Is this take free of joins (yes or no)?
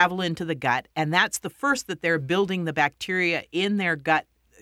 yes